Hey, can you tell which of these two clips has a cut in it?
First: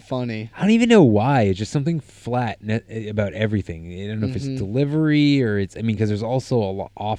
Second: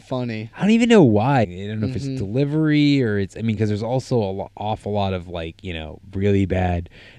second; 1 cut; at 1.4 s

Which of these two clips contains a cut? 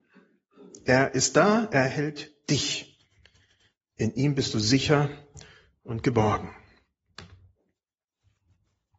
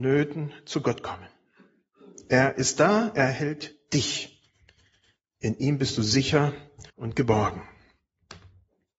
second; 1 cut; at 6.9 s

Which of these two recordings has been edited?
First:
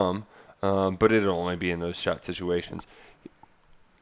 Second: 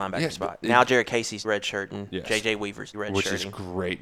second; 2 cuts; at 1.4 s, 2.9 s

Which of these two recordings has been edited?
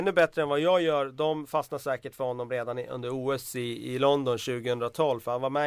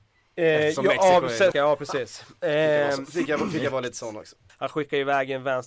second; 2 cuts; at 1.5 s, 4.5 s

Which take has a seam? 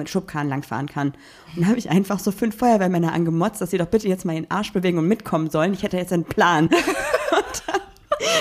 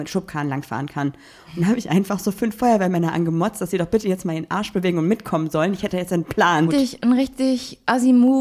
second; 1 cut; at 6.7 s

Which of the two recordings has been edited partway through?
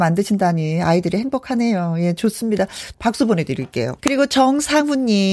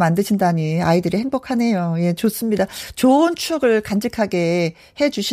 first; 2 cuts; at 2.9 s, 4.0 s

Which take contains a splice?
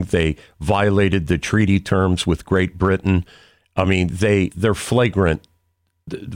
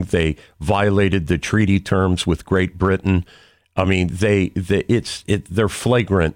first; 1 cut; at 4.5 s

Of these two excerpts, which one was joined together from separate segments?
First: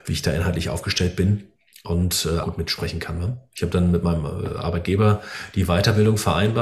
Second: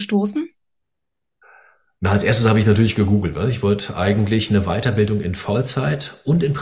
first; 1 cut; at 2.4 s

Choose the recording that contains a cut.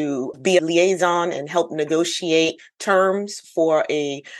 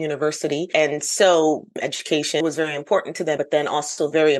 second; 1 cut; at 3.4 s

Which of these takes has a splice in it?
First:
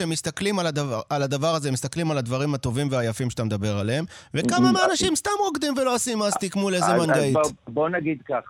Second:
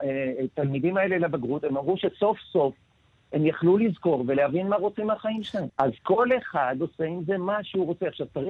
second; 1 cut; at 5.7 s

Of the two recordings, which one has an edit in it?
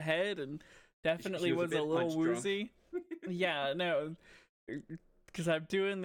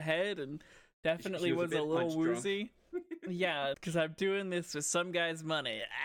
second; 1 cut; at 3.7 s

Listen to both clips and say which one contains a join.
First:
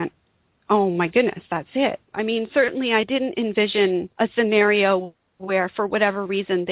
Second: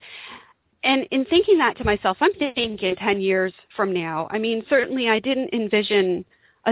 first; 2 cuts; at 2.1 s, 4.1 s

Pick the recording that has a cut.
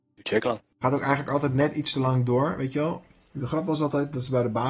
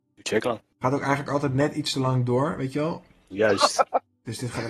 second; 1 cut; at 3.3 s

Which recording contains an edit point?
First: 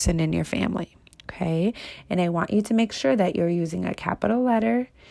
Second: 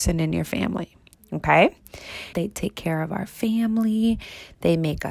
second; 2 cuts; at 1.1 s, 2.3 s

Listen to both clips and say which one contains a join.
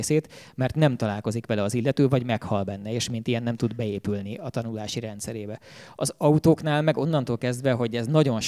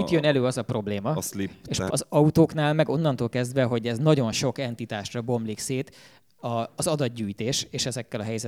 second; 1 cut; at 1.9 s

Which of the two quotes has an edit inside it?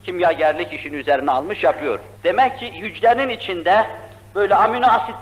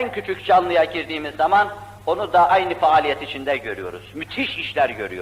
first; 1 cut; at 2.2 s

